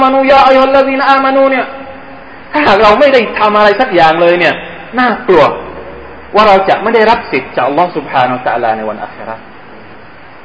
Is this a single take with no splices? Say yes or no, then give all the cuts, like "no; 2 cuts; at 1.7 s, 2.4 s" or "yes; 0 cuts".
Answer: yes; 0 cuts